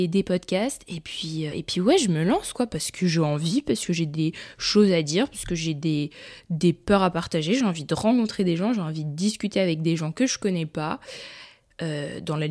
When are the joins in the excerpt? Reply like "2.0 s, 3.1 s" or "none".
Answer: 1.5 s